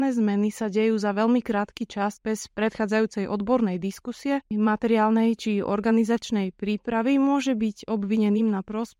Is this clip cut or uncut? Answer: cut